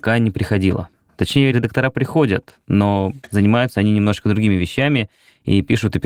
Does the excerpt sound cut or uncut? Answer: uncut